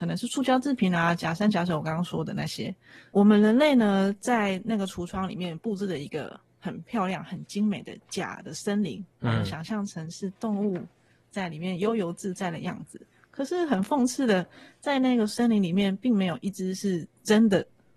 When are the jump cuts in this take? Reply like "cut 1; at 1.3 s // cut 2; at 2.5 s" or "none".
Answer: none